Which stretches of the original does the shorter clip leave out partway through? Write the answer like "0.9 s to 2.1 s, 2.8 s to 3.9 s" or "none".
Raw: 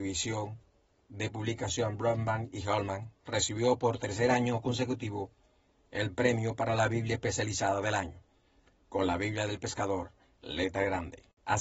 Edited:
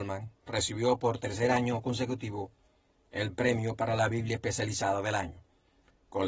none